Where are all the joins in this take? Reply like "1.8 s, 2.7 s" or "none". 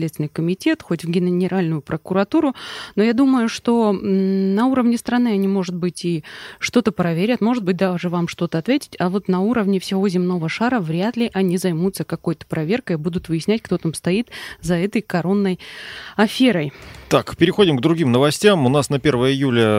none